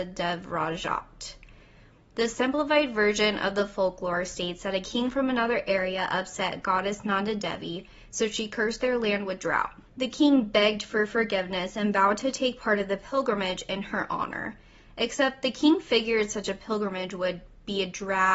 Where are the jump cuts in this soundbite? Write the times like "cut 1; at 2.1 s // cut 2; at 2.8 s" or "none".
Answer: none

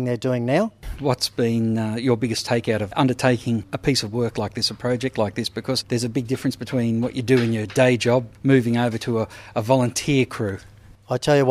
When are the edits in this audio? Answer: none

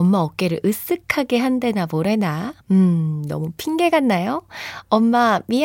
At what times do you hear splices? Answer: cut 1; at 2.6 s

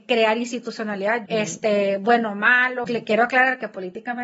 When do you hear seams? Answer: cut 1; at 1.3 s // cut 2; at 2.8 s

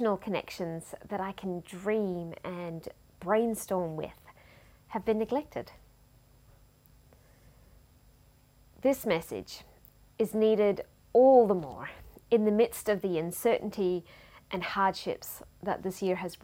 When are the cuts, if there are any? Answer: none

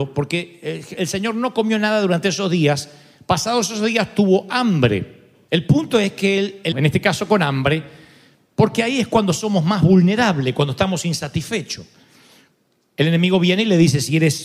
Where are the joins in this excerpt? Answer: cut 1; at 5.5 s // cut 2; at 6.7 s

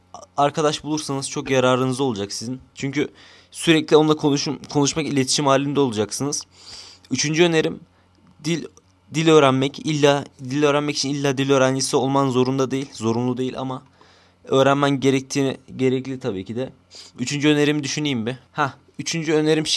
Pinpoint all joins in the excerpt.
none

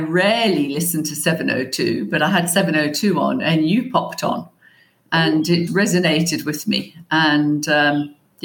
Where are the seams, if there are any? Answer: cut 1; at 5.7 s

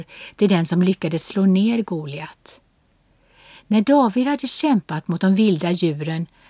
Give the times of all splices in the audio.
none

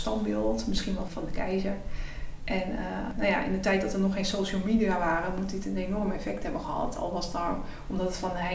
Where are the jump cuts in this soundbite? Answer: cut 1; at 1.1 s

